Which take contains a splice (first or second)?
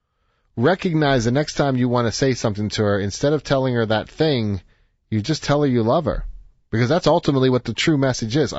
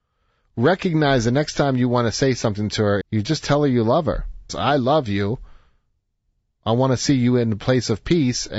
second